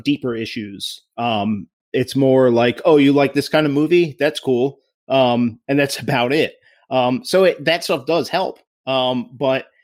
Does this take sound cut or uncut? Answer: uncut